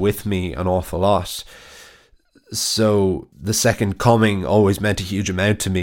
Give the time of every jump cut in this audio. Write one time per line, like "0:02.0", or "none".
0:03.3